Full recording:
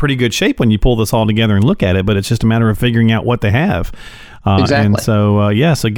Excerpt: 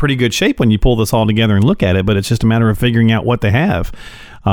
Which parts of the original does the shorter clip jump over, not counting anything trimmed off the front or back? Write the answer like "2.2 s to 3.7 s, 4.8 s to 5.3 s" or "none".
none